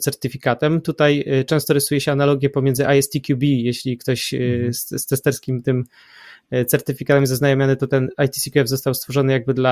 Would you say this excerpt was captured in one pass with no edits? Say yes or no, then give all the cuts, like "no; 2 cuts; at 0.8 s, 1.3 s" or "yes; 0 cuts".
yes; 0 cuts